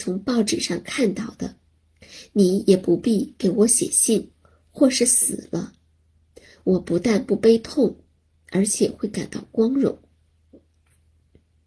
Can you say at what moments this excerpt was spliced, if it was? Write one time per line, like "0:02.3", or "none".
0:04.3